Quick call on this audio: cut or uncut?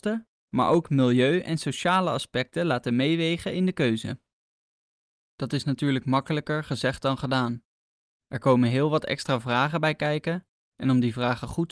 uncut